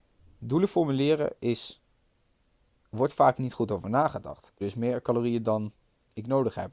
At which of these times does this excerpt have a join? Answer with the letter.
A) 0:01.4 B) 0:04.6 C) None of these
B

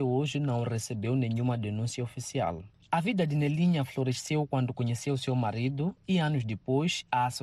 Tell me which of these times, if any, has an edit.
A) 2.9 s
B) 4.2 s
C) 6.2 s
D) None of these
D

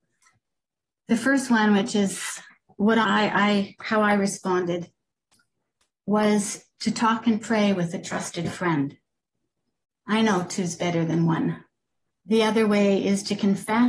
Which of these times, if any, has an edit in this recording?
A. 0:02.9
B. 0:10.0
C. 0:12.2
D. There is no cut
C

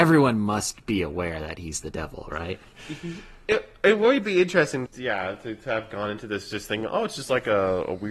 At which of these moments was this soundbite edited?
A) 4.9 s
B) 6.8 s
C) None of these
A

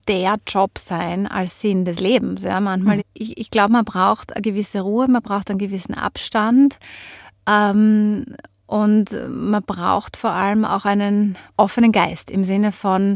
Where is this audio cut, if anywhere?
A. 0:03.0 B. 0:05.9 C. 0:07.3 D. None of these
A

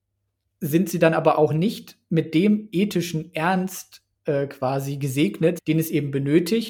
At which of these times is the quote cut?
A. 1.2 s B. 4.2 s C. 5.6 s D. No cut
C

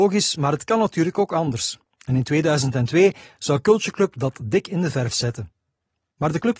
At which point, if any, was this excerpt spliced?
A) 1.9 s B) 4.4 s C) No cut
C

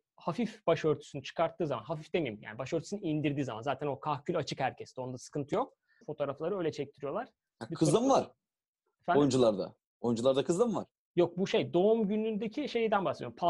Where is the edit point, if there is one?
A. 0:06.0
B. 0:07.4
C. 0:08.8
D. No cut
A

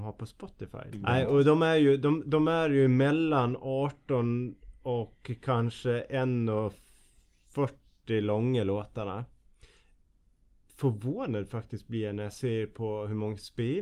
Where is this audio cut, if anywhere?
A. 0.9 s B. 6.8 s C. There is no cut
A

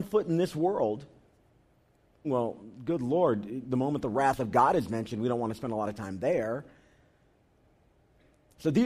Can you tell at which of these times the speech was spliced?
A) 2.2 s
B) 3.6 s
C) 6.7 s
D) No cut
A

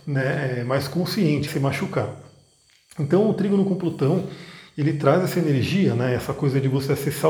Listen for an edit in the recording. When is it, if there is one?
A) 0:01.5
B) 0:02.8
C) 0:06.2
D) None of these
A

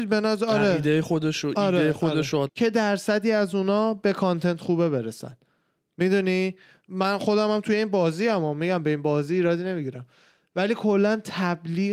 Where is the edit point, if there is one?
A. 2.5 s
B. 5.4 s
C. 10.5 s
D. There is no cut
A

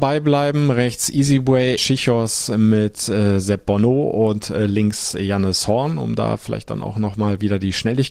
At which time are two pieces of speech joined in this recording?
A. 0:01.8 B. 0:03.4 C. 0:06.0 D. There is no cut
A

